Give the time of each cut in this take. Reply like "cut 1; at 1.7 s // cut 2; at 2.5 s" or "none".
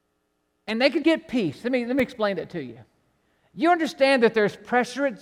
cut 1; at 1.0 s